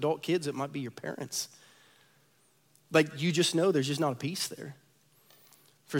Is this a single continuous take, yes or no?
yes